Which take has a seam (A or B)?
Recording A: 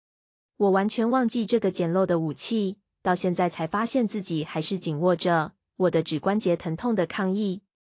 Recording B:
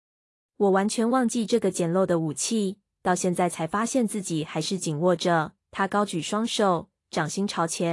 B